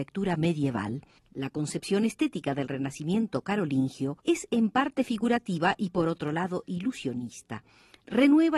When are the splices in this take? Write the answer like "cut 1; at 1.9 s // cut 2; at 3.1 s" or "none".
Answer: cut 1; at 1.2 s // cut 2; at 4.2 s

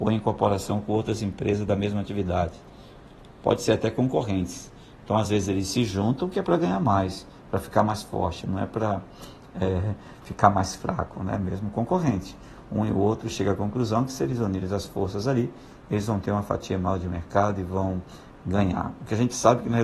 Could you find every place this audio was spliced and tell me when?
none

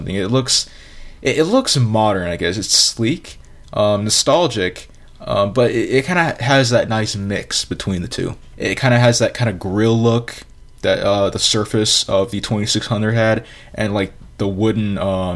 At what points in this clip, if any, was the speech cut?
cut 1; at 8.5 s

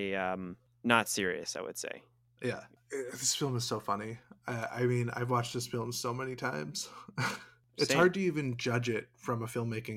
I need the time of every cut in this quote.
none

